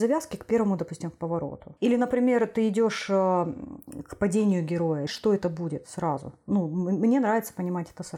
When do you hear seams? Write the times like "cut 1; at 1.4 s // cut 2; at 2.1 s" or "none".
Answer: cut 1; at 1.8 s // cut 2; at 5.1 s

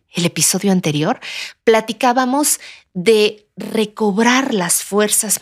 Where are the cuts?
none

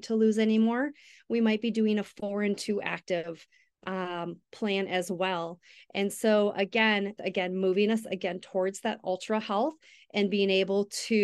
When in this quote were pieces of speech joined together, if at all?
cut 1; at 7.2 s

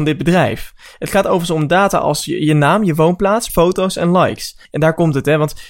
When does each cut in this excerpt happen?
cut 1; at 3.5 s // cut 2; at 4.6 s

